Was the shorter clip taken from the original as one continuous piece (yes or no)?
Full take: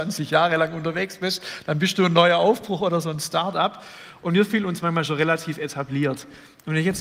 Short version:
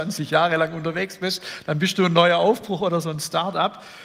yes